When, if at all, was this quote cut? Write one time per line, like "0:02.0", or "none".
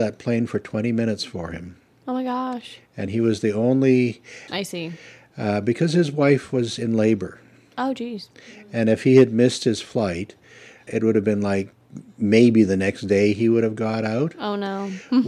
0:04.5
0:10.9